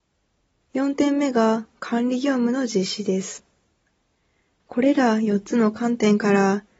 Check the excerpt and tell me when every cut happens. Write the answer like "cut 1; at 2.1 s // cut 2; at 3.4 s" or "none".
cut 1; at 4.6 s